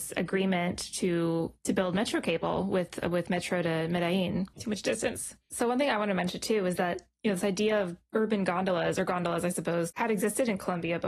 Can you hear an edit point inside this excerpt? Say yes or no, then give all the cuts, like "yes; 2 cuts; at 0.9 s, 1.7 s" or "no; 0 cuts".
yes; 2 cuts; at 4.5 s, 9.9 s